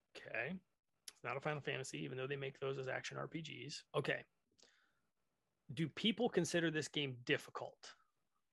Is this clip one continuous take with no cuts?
no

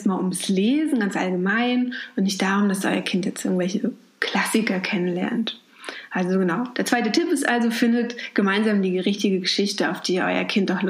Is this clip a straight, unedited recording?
yes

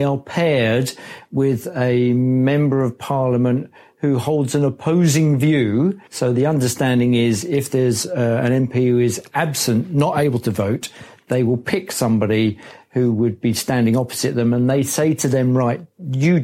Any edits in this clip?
yes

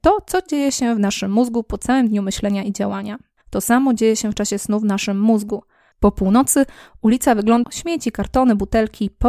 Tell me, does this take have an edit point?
yes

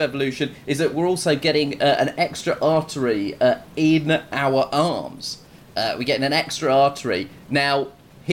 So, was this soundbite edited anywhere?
no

